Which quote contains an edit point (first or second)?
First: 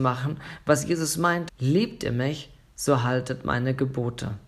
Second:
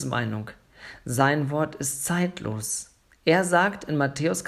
first